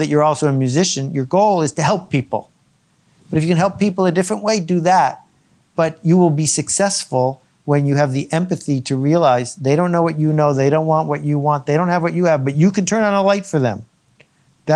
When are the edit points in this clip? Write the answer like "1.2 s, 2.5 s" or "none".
3.2 s